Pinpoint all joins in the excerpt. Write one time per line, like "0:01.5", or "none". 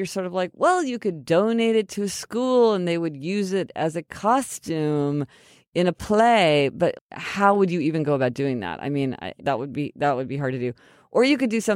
0:06.9
0:09.4